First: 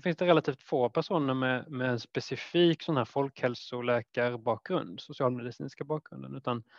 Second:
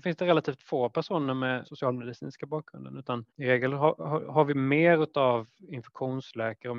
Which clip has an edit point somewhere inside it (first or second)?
second